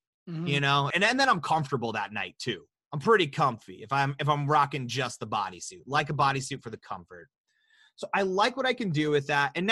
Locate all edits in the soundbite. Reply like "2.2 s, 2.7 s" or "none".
0.9 s